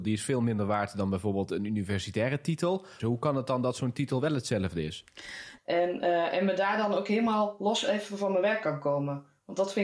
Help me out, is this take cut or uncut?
cut